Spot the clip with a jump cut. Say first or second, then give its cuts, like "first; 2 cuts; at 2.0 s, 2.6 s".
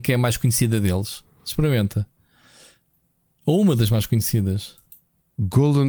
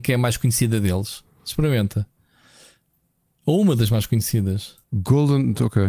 second; 1 cut; at 4.8 s